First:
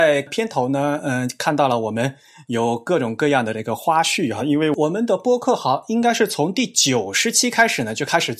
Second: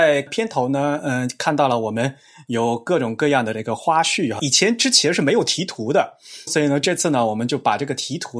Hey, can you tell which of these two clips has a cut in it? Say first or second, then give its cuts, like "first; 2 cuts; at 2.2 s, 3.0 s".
second; 2 cuts; at 4.4 s, 6.5 s